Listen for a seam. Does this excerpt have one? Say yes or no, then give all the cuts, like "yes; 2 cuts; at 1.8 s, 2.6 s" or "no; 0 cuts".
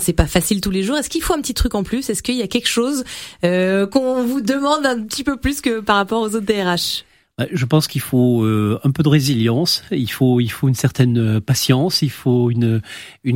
no; 0 cuts